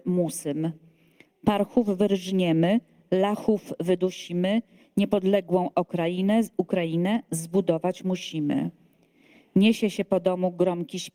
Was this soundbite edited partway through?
no; 0 cuts

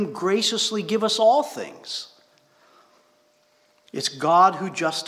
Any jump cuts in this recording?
no; 0 cuts

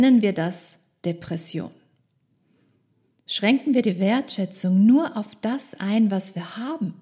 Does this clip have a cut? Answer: no; 0 cuts

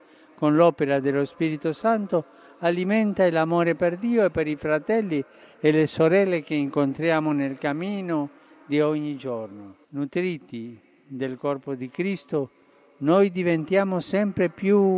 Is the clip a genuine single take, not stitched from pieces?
no; 1 cut; at 9.8 s

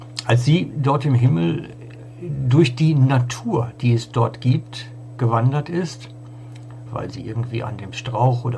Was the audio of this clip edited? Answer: yes; 1 cut; at 6.9 s

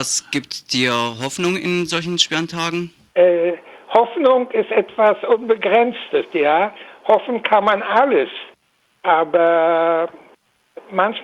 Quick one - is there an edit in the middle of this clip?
no; 0 cuts

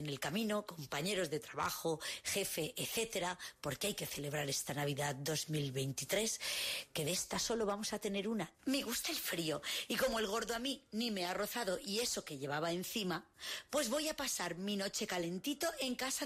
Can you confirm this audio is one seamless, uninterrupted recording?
no; 1 cut; at 8.6 s

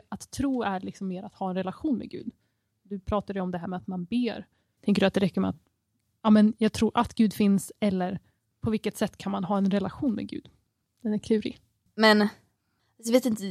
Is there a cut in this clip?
yes; 2 cuts; at 4.8 s, 11.9 s

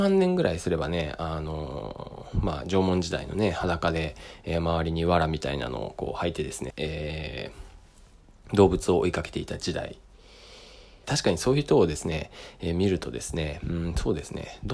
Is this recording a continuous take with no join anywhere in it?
no; 2 cuts; at 6.7 s, 11.0 s

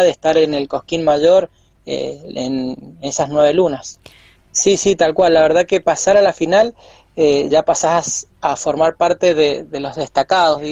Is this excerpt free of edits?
no; 2 cuts; at 4.4 s, 7.5 s

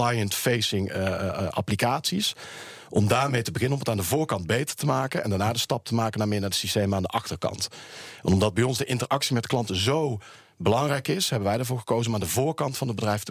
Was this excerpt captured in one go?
yes; 0 cuts

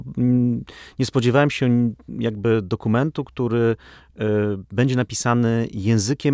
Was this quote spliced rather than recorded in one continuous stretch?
no; 0 cuts

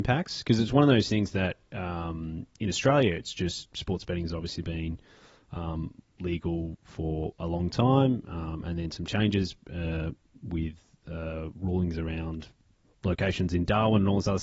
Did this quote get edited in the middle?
no; 0 cuts

